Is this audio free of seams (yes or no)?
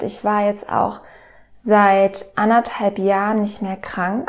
yes